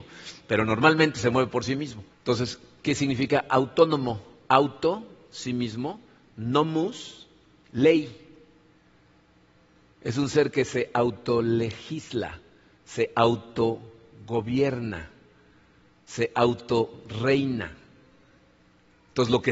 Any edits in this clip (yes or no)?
yes